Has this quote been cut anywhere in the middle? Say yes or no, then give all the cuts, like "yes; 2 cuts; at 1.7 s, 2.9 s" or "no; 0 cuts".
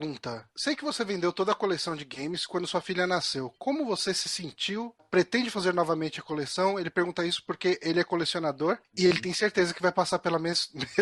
no; 0 cuts